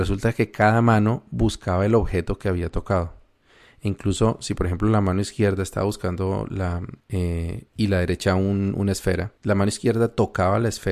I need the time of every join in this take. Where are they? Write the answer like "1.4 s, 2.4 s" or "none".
7.0 s, 9.4 s